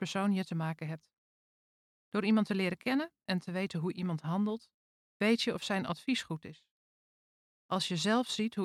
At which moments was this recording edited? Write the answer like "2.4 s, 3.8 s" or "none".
none